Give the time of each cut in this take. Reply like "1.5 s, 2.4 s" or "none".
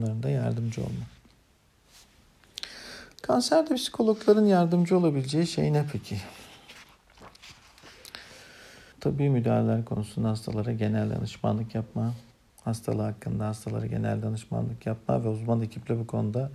3.1 s, 8.9 s